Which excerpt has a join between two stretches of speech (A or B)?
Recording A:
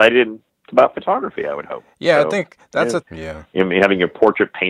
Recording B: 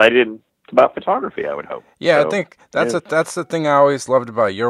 A